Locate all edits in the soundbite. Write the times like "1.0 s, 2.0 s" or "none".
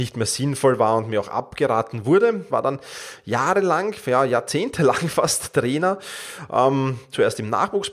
2.5 s